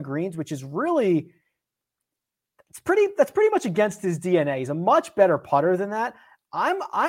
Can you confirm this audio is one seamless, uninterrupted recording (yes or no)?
yes